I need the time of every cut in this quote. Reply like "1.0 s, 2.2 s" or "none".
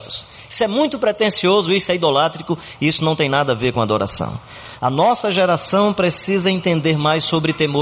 none